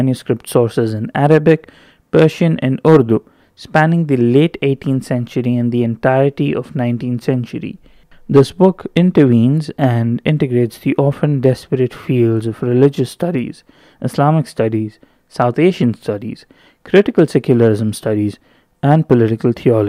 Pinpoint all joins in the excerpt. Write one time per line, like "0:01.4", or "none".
none